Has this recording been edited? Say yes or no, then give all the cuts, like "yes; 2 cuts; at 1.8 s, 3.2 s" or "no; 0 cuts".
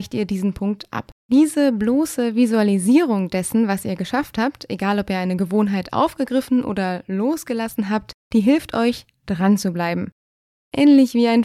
yes; 1 cut; at 1.2 s